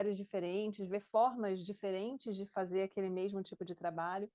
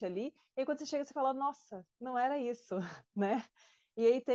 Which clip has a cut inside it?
second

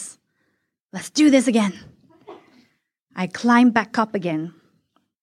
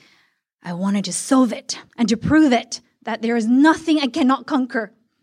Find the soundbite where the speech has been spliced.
second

